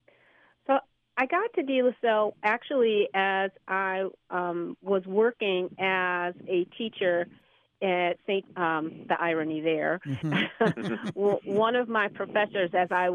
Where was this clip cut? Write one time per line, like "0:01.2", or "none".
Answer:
0:08.5